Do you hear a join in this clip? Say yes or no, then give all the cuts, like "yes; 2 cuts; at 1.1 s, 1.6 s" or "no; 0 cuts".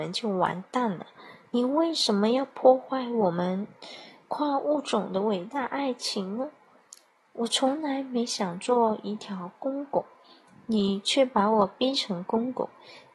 no; 0 cuts